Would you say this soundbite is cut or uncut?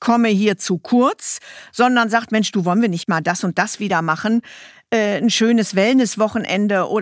uncut